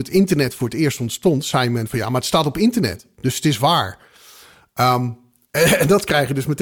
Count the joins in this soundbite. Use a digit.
0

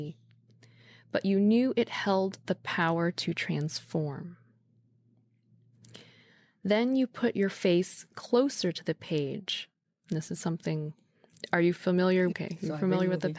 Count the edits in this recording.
2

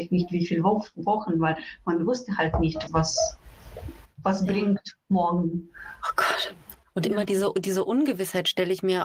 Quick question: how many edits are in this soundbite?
1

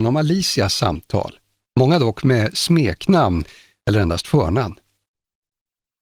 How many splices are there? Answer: 1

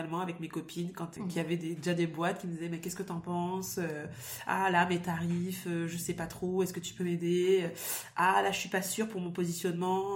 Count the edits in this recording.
1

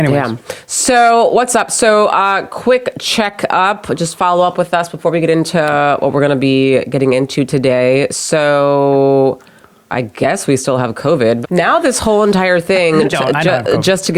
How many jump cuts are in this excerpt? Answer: 2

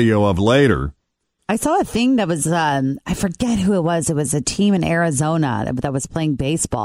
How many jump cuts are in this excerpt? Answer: 1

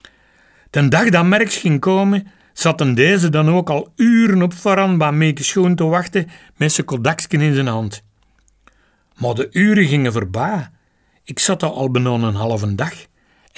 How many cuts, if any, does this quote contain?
0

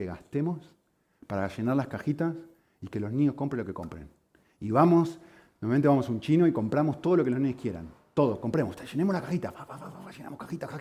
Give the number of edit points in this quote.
0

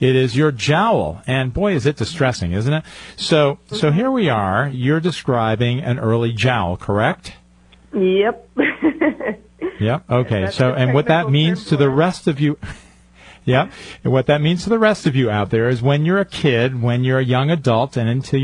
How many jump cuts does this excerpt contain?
1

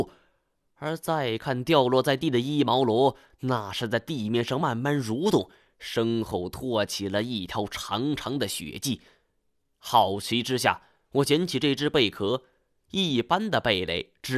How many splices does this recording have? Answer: 0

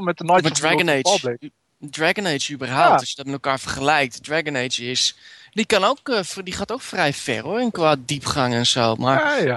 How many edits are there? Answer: 0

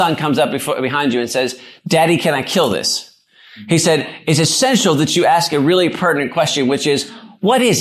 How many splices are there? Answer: 0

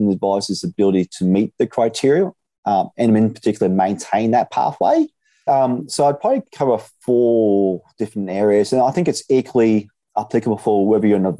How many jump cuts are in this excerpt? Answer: 1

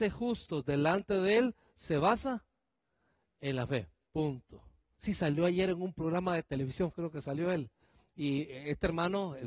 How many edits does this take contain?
2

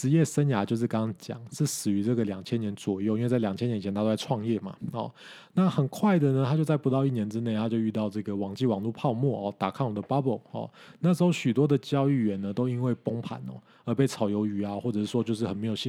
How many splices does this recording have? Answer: 0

